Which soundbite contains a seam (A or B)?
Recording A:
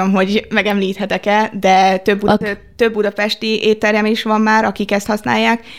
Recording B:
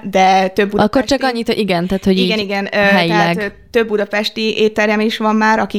A